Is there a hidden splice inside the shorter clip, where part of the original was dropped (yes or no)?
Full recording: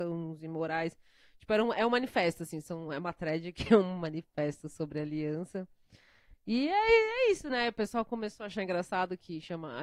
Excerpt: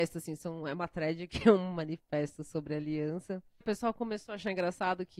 yes